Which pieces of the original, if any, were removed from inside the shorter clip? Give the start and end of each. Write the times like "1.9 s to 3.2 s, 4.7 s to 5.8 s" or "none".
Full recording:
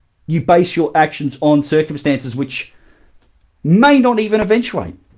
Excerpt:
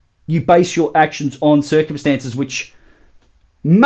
none